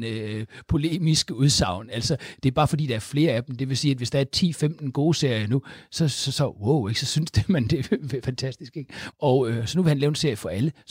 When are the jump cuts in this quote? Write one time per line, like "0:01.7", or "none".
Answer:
0:09.1